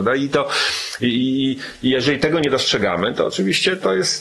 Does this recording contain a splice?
no; 0 cuts

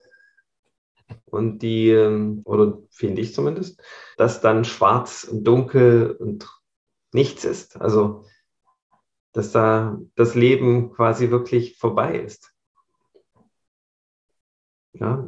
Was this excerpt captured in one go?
no; 3 cuts; at 1.2 s, 2.4 s, 4.1 s

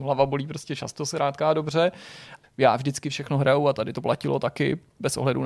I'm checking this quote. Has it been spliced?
yes; 1 cut; at 2.4 s

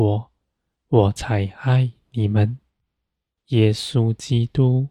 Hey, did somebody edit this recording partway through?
no; 0 cuts

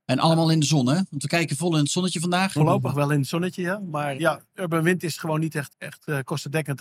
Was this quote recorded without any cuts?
no; 2 cuts; at 4.2 s, 5.7 s

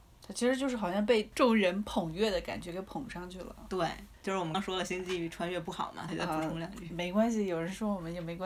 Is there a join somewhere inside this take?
yes; 2 cuts; at 4.5 s, 6.1 s

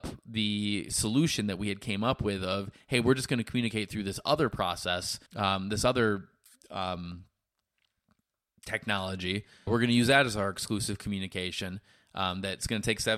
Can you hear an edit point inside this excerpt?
yes; 2 cuts; at 5.3 s, 9.7 s

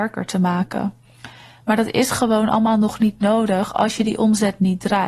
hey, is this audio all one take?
yes; 0 cuts

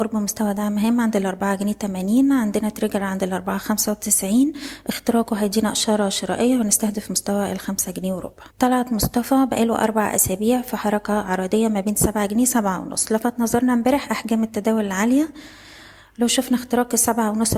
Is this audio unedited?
no; 1 cut; at 8.5 s

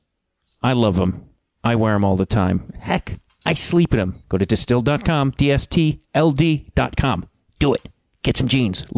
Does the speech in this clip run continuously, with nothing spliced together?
no; 1 cut; at 4.2 s

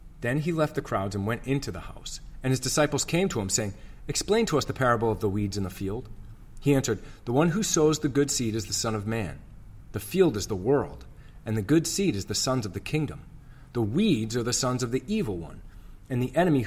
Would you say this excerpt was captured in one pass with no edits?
yes; 0 cuts

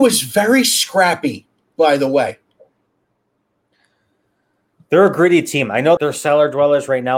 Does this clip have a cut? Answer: yes; 1 cut; at 6.0 s

